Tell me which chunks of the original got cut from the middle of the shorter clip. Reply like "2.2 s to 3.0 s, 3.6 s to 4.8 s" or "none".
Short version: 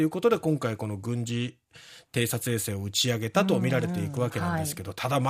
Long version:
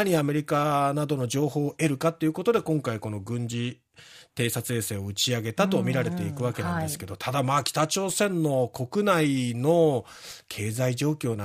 none

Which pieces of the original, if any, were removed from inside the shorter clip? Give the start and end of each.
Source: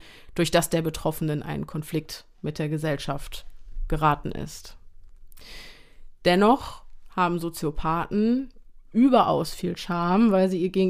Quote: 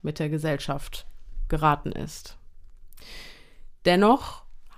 none

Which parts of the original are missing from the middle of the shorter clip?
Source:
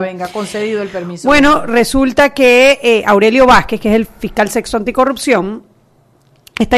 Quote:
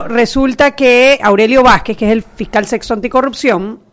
2.8 s to 3.0 s

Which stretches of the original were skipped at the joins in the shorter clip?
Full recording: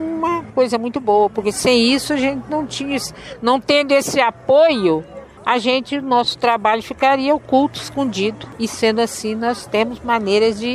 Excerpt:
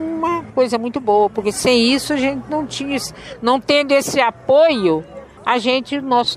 none

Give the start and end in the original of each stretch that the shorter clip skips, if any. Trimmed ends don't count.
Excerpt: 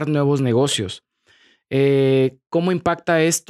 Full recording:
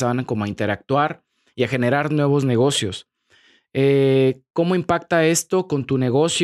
none

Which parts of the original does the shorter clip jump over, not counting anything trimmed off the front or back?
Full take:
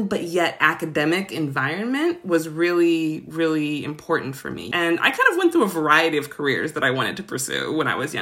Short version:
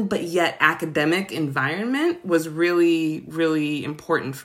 none

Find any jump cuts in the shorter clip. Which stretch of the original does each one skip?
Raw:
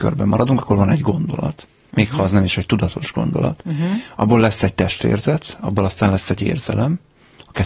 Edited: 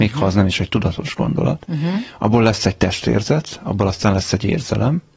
none

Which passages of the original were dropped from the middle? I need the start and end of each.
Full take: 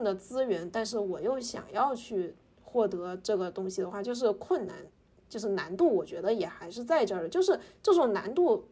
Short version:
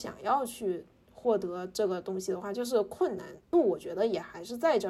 5.0 s to 5.8 s

